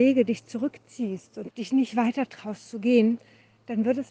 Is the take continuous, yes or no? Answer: no